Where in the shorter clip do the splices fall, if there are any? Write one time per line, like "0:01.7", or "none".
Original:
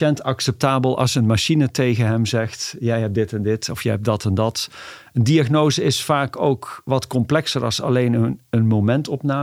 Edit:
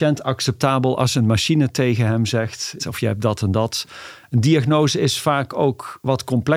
0:02.8